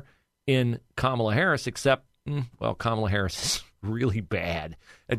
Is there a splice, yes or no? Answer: no